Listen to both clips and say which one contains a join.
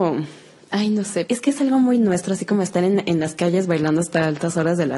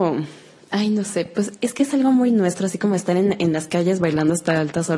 first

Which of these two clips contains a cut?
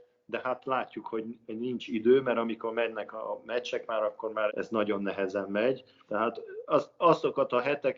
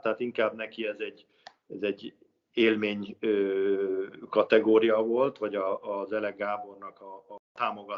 first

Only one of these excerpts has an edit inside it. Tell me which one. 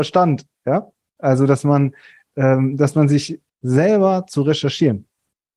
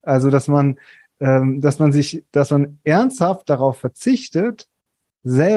first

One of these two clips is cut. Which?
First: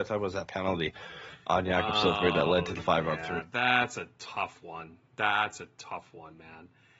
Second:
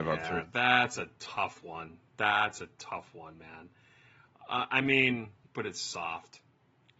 second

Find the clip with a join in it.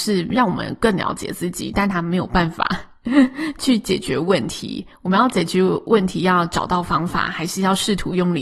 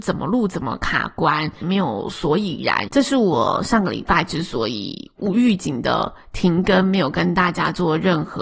second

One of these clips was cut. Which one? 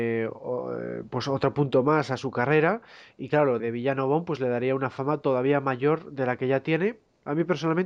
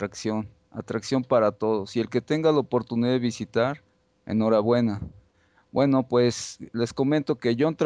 first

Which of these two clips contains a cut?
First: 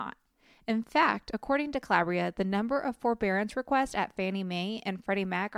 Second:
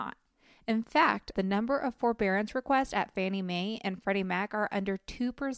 second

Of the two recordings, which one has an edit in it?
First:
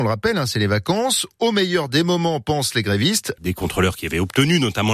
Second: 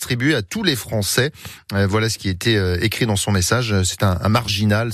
first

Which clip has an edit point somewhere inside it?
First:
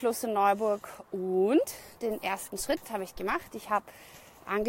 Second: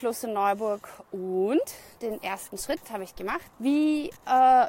second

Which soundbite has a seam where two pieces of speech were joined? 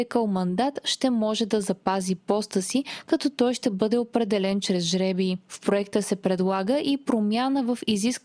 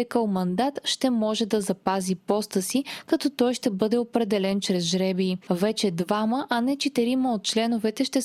second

